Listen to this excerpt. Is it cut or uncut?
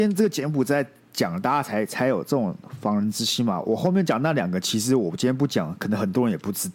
uncut